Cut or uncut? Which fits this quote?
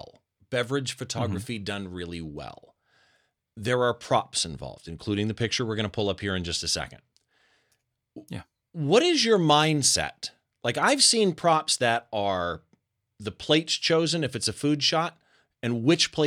uncut